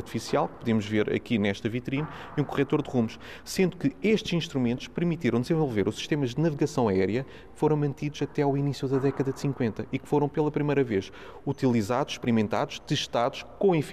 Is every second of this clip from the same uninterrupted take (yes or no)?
yes